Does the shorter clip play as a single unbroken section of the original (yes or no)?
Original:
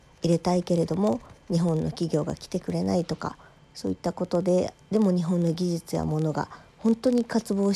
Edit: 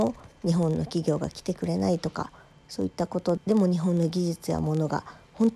no